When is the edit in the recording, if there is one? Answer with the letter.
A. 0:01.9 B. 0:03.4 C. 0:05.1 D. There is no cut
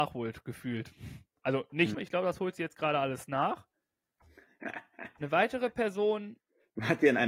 A